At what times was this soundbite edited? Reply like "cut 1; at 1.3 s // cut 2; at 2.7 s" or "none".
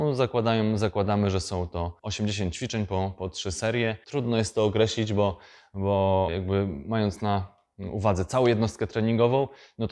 cut 1; at 4.0 s